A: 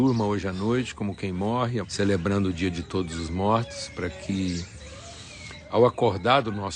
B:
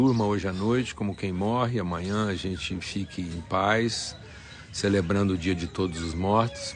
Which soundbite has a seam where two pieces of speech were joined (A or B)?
A